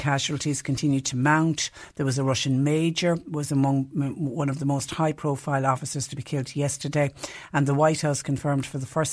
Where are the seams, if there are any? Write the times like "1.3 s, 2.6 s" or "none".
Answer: none